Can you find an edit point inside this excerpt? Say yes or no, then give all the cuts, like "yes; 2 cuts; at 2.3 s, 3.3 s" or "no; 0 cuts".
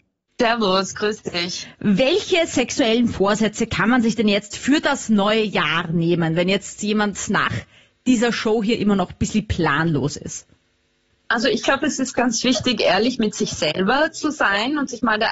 no; 0 cuts